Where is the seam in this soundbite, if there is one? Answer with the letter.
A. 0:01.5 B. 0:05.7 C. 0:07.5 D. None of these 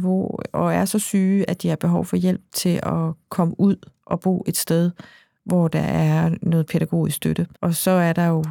C